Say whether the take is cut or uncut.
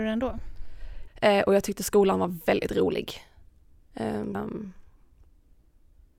cut